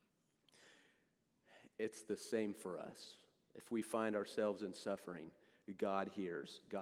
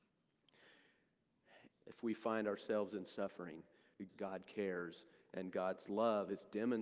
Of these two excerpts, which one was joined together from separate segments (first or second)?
second